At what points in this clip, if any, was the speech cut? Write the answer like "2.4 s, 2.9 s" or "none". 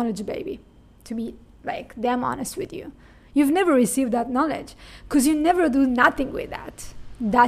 none

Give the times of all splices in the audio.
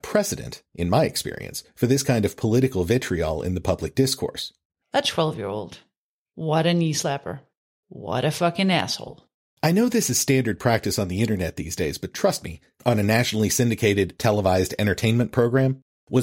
4.8 s

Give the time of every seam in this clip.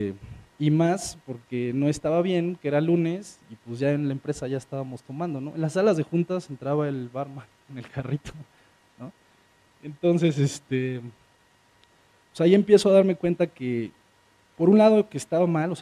none

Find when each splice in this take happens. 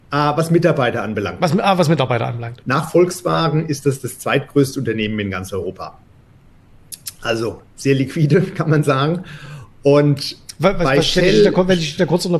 2.6 s

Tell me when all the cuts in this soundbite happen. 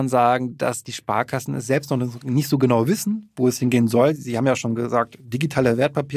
none

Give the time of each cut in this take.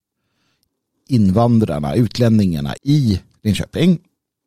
2.8 s

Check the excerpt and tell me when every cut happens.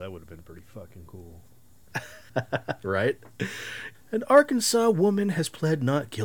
2.3 s, 3.9 s

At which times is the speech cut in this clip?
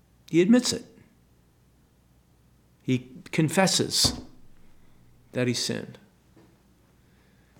none

